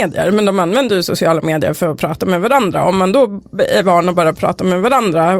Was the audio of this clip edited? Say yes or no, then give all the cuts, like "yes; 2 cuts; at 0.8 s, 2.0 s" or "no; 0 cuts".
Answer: no; 0 cuts